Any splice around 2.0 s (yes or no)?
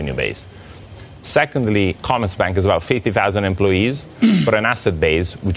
yes